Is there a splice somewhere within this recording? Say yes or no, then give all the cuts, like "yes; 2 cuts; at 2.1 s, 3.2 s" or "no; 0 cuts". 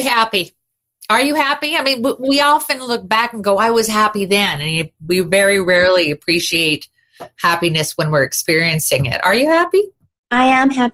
no; 0 cuts